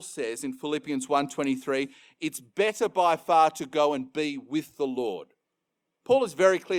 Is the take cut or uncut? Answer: uncut